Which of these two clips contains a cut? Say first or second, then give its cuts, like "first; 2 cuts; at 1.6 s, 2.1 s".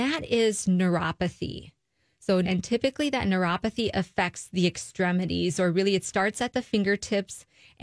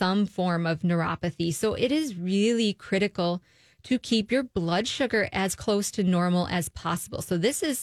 first; 1 cut; at 2.4 s